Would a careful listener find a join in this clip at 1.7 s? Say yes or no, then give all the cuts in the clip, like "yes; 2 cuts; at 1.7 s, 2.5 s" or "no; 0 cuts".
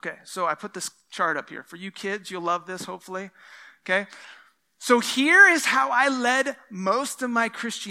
no; 0 cuts